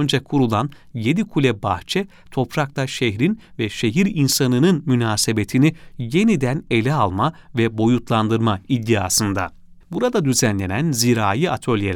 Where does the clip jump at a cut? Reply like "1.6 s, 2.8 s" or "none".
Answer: 9.8 s